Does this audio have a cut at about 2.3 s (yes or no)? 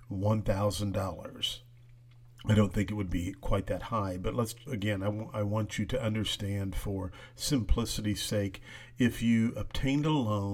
no